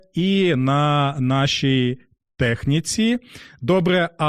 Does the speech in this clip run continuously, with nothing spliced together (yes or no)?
yes